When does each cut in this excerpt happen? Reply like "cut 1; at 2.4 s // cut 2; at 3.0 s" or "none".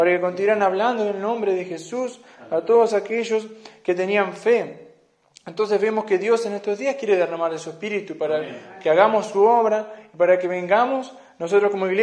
none